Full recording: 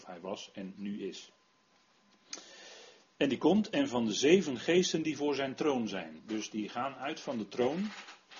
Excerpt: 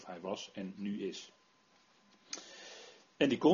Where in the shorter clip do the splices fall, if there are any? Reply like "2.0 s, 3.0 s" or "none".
none